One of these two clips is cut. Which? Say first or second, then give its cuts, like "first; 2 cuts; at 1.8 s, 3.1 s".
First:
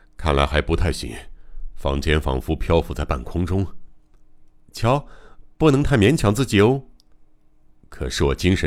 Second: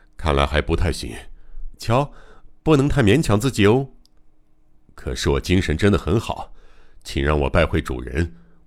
second; 1 cut; at 1.7 s